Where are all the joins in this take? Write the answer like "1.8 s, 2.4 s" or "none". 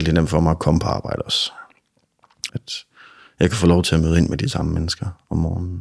2.5 s